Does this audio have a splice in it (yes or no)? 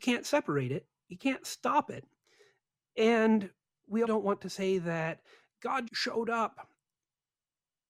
yes